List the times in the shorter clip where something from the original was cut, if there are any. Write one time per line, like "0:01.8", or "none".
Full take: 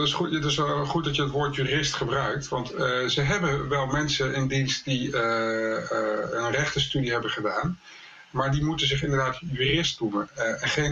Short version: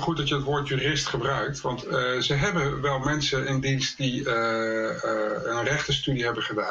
none